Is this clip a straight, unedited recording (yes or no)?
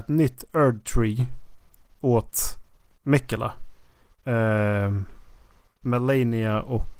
no